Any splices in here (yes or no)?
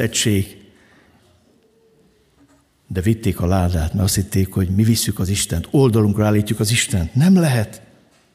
no